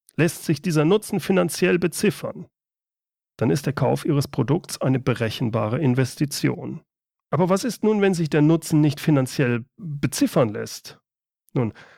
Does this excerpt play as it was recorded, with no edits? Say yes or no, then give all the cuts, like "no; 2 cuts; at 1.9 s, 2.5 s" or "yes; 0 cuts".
no; 1 cut; at 7.2 s